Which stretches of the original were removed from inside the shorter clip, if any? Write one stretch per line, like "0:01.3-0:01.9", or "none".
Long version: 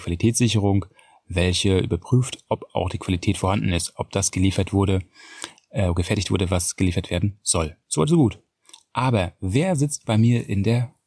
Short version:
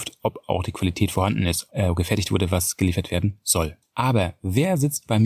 0:03.9-0:05.7
0:07.8-0:08.8